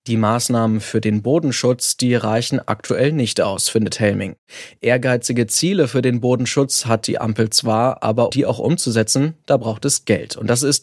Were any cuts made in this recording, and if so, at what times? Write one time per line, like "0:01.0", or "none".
0:08.3